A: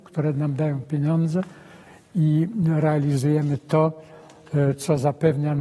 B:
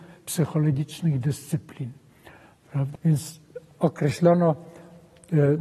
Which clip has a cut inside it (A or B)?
B